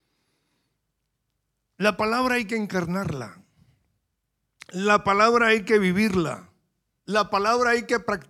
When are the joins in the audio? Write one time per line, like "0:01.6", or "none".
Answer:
none